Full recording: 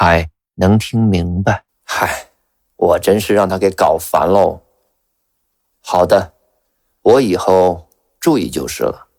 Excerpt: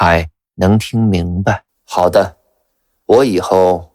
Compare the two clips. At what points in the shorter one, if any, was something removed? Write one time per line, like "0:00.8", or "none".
0:01.7